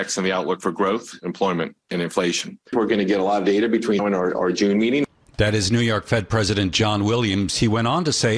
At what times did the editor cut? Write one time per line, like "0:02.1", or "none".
0:04.0